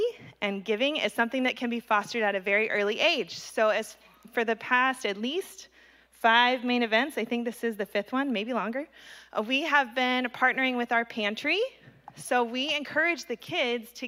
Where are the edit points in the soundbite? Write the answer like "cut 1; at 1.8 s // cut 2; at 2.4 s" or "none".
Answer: none